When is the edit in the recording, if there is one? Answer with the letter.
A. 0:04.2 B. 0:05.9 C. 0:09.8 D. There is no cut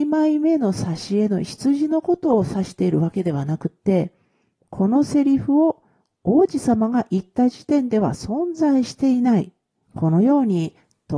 C